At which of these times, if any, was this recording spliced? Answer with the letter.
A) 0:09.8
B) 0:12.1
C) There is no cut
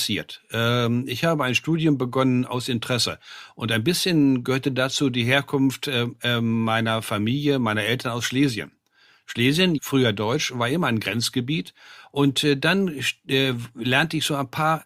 A